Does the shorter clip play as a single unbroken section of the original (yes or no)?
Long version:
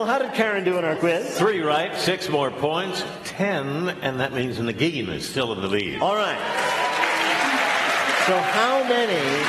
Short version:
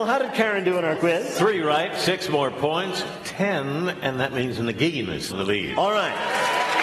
no